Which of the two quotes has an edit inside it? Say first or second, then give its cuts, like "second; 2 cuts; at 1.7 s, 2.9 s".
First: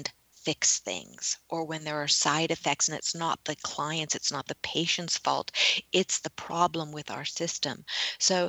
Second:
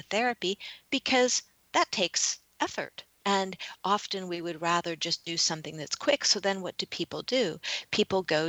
second; 1 cut; at 3.2 s